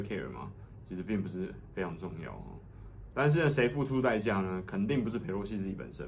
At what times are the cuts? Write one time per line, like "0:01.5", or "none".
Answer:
0:03.1